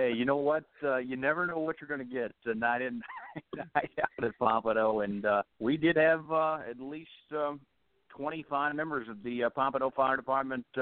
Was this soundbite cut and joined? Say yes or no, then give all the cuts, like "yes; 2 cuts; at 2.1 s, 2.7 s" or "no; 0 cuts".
yes; 1 cut; at 5.5 s